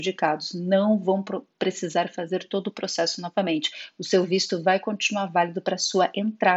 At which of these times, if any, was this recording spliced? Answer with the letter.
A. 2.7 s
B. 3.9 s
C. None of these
C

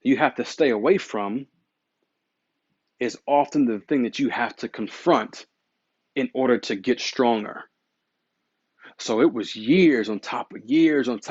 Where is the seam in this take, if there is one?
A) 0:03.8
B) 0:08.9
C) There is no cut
A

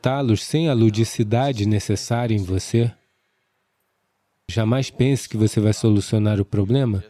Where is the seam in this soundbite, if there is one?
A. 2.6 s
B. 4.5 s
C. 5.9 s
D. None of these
B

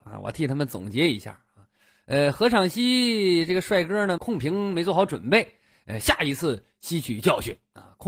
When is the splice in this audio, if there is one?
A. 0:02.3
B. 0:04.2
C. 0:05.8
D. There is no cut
B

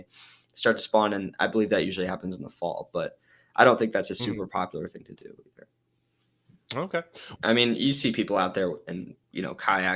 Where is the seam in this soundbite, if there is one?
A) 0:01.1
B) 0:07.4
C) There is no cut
B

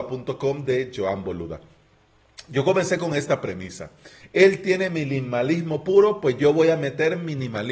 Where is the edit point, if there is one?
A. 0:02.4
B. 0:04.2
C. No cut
B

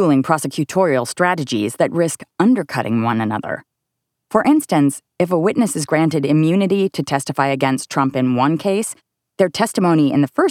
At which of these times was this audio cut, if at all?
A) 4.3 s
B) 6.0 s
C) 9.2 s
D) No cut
C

